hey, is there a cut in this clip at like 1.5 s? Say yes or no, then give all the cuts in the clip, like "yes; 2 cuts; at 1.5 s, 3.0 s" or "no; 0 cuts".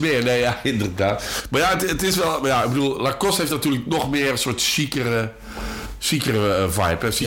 no; 0 cuts